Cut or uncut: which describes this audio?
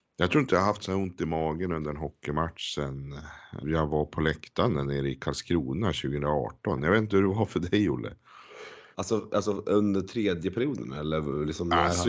cut